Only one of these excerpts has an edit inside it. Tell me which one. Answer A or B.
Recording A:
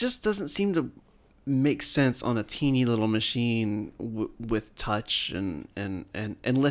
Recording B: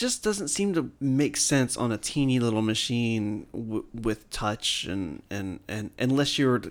B